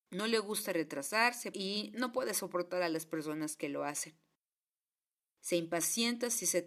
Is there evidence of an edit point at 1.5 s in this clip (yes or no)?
yes